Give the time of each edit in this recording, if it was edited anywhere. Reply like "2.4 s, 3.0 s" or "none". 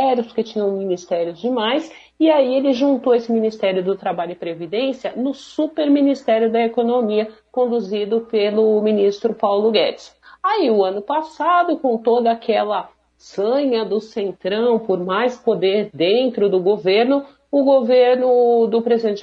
none